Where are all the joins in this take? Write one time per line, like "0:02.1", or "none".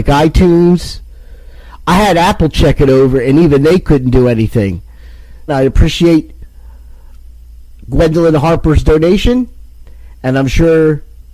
0:05.5